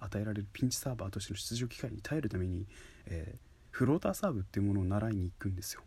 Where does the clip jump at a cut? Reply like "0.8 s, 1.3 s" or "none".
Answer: none